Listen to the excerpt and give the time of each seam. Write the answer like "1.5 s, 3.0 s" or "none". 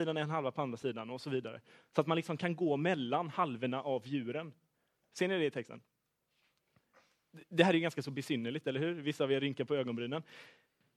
none